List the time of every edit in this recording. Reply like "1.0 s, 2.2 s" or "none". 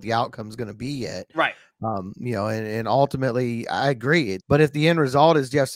4.4 s